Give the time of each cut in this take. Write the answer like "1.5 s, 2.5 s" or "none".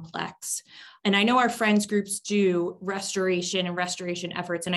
none